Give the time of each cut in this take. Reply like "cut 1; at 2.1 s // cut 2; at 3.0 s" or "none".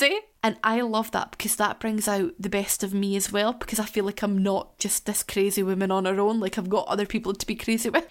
none